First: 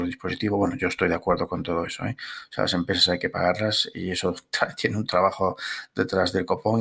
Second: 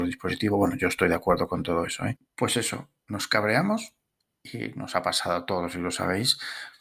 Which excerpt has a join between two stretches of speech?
second; 1 cut; at 2.2 s

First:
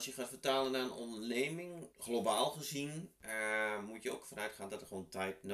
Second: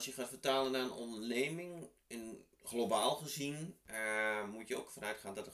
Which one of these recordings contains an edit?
first; 1 cut; at 1.9 s

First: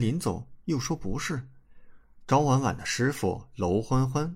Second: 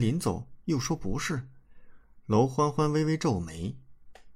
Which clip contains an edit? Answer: first; 1 cut; at 2.2 s

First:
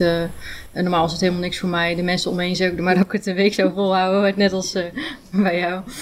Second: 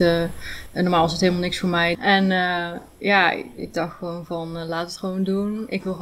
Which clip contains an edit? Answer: second; 1 cut; at 1.9 s

